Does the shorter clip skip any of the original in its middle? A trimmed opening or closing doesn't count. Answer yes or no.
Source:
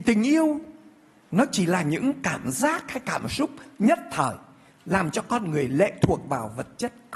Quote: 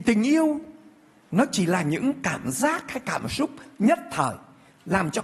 no